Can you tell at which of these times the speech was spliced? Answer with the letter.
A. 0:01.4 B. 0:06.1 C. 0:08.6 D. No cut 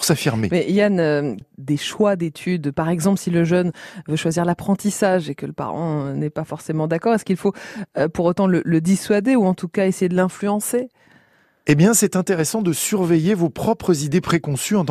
A